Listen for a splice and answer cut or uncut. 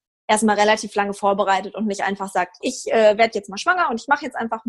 cut